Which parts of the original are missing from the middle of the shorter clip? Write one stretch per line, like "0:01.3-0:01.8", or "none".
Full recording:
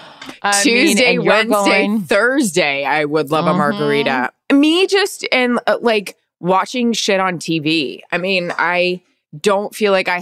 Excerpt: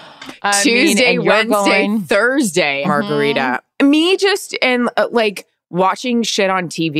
0:02.8-0:03.5